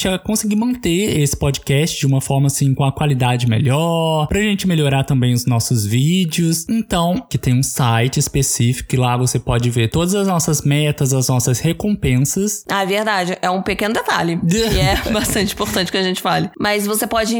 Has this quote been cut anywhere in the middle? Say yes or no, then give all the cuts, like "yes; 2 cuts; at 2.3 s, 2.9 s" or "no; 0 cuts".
yes; 2 cuts; at 7.3 s, 12.6 s